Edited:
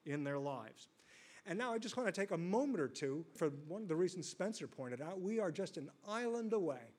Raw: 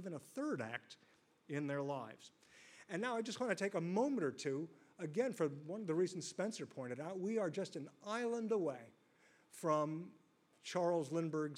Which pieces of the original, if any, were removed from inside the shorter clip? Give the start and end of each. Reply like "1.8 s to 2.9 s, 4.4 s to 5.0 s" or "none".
4.8 s to 5.3 s